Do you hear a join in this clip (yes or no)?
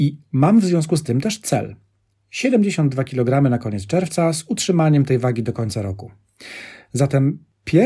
no